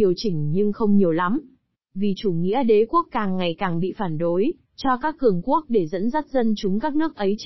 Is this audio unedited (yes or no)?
no